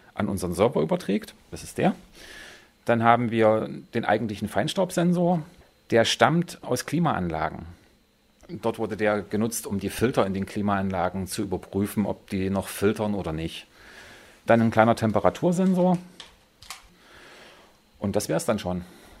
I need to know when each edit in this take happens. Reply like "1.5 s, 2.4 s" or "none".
none